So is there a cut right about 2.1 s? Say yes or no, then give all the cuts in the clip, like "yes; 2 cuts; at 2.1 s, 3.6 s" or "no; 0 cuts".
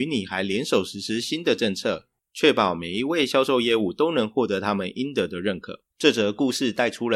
no; 1 cut; at 5.9 s